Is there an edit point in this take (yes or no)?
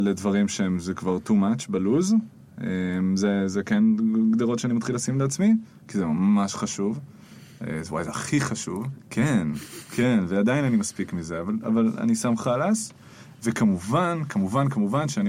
yes